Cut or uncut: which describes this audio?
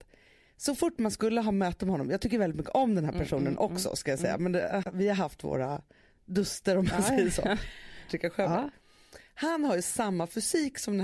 cut